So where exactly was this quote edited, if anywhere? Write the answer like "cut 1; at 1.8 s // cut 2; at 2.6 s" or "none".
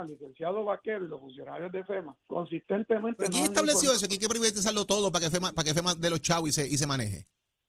cut 1; at 2.2 s